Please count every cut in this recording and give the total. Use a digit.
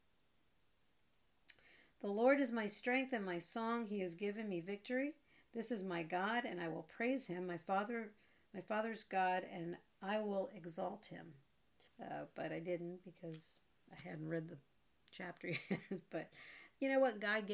1